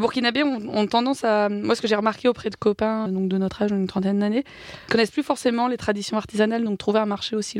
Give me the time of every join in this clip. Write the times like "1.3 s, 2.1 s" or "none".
3.1 s, 6.7 s